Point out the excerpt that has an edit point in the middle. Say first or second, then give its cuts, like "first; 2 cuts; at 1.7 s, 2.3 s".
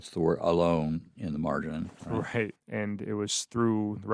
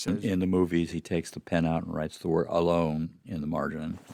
first; 1 cut; at 2.6 s